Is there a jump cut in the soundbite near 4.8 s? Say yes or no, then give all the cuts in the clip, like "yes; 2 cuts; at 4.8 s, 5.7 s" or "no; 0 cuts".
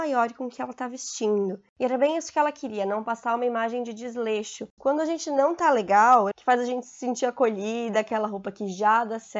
yes; 2 cuts; at 4.8 s, 6.3 s